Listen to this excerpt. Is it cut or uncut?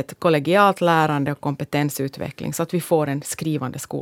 uncut